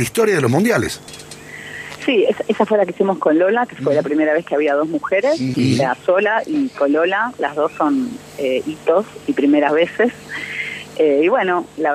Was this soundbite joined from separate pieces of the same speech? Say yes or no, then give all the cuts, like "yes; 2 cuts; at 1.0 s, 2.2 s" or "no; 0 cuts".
yes; 1 cut; at 5.5 s